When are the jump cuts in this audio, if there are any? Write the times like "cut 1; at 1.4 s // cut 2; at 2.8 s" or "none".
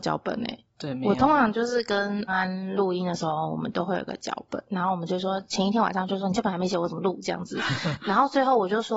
cut 1; at 2.3 s // cut 2; at 8.0 s